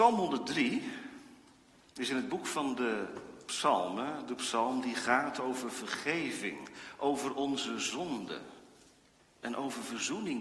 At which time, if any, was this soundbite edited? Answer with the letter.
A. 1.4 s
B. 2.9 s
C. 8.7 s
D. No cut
D